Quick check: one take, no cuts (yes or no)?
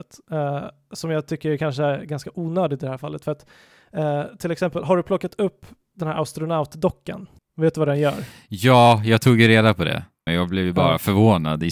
no